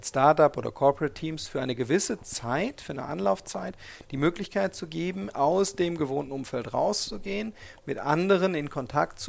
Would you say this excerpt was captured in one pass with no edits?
yes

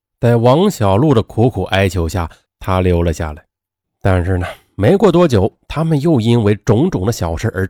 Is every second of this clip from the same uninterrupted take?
no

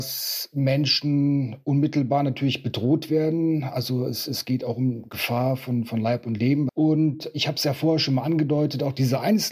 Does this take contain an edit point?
yes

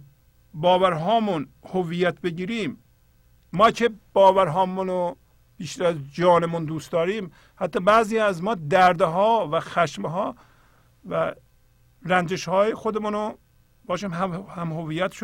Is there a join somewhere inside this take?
no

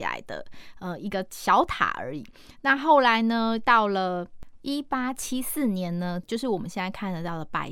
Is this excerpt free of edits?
no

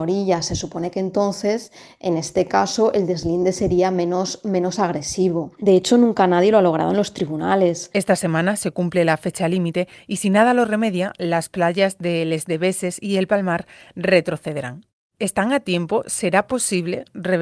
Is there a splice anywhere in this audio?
yes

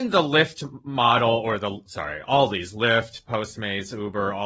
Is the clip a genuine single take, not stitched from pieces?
yes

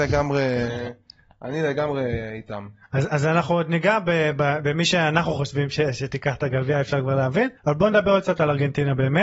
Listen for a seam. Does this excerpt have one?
yes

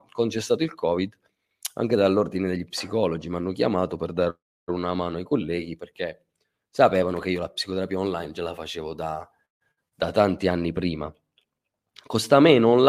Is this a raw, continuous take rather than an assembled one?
yes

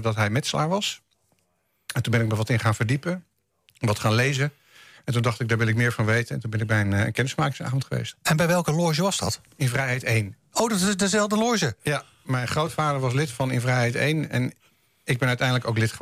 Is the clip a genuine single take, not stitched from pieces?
yes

